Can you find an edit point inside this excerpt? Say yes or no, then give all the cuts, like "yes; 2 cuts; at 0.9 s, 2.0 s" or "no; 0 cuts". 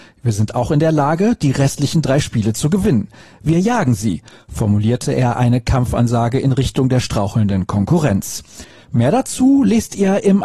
no; 0 cuts